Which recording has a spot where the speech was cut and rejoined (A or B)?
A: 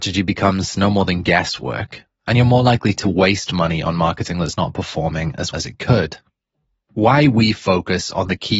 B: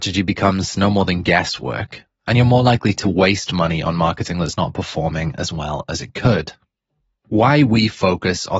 A